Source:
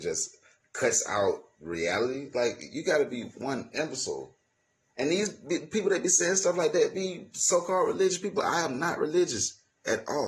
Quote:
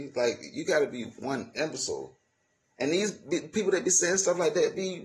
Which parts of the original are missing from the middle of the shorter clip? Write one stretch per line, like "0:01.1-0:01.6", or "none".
none